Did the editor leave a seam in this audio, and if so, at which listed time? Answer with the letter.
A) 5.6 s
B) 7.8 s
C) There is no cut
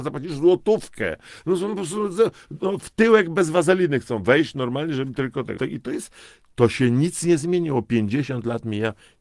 A